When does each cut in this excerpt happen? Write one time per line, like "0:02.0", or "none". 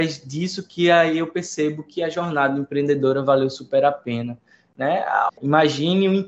0:05.3